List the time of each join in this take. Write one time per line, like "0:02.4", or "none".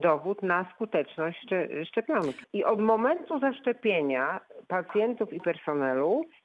0:02.4